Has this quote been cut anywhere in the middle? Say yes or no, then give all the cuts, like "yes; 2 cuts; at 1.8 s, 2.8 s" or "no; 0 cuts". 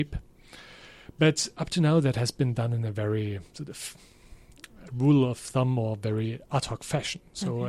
no; 0 cuts